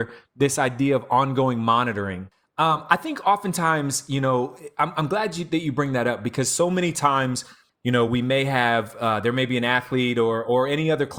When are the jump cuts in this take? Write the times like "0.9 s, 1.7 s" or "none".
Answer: none